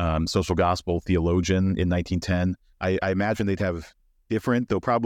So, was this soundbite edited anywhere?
yes; 1 cut; at 2.7 s

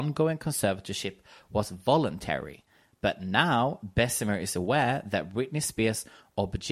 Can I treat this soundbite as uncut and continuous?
yes; 0 cuts

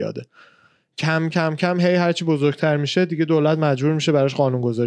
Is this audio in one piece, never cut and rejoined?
no; 1 cut; at 1.3 s

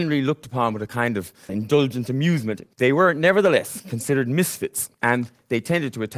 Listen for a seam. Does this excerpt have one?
yes; 2 cuts; at 1.5 s, 2.7 s

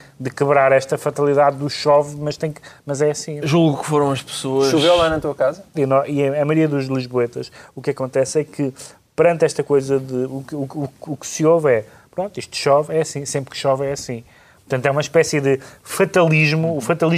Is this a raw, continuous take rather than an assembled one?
no; 2 cuts; at 3.4 s, 5.7 s

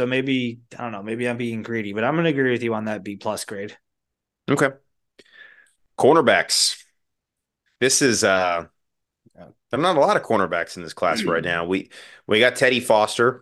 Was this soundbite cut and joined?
no; 0 cuts

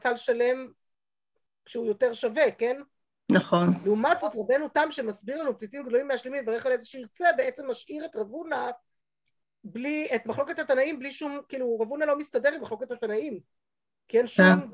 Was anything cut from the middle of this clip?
no; 0 cuts

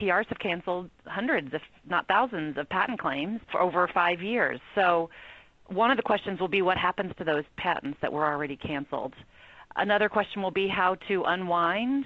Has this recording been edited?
no; 0 cuts

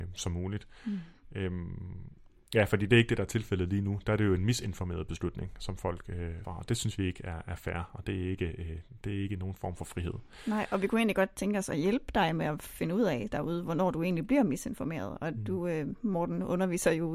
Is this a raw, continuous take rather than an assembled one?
no; 1 cut; at 6.4 s

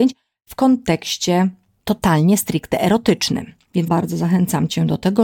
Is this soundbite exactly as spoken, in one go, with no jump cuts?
no; 1 cut; at 3.9 s

